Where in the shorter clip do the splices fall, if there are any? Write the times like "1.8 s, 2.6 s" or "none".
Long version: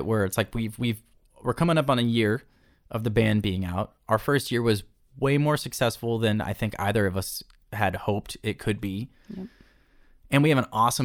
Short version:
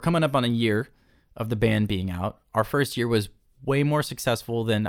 none